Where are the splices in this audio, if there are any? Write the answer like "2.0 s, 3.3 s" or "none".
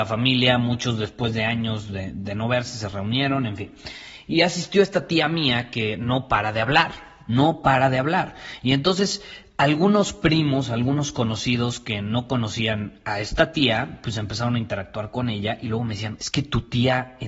16.2 s

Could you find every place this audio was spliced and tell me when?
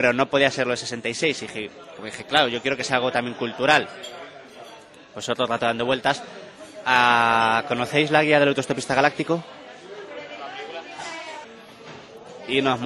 11.4 s

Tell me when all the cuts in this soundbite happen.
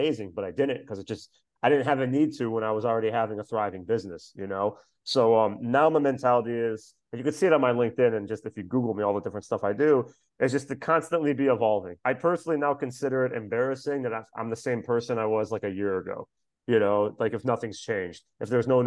none

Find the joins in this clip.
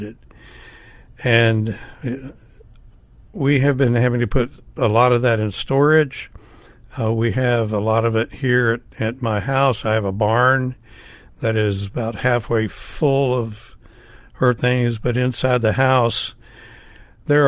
none

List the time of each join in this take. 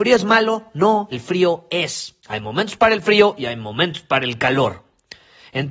1.1 s, 2.2 s

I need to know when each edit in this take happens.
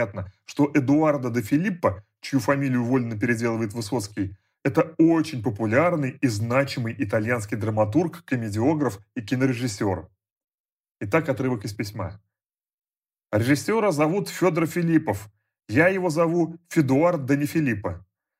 none

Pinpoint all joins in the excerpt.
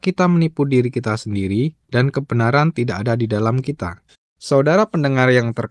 4.1 s

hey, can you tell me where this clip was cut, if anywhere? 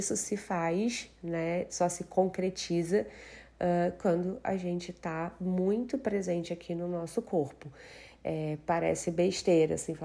none

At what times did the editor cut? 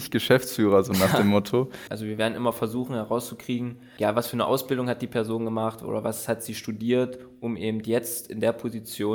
1.9 s

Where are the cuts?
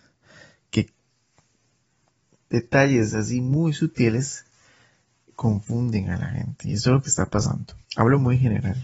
7.9 s

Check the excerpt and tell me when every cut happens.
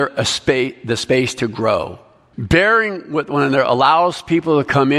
2.3 s

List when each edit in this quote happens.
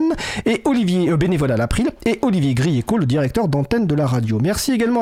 none

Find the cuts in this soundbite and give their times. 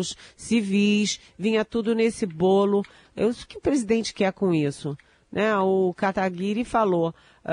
3.5 s

